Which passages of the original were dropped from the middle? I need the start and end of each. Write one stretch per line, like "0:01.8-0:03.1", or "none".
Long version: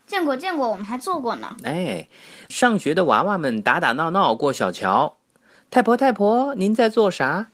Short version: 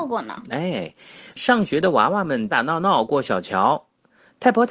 0:03.6-0:03.8